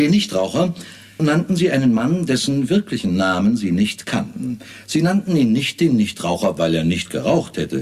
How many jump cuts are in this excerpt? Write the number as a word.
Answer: one